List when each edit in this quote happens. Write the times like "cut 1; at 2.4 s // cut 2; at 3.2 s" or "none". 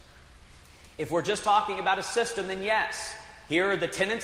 none